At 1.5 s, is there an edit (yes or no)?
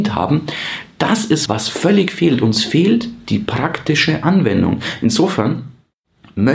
yes